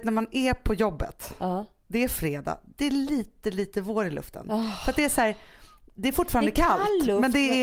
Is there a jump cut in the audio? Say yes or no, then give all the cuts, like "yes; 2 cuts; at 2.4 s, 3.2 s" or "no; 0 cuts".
no; 0 cuts